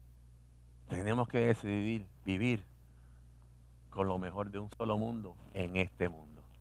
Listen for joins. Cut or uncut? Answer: cut